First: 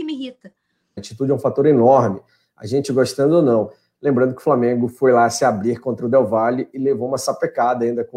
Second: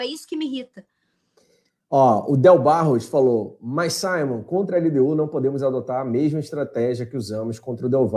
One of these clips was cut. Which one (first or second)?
first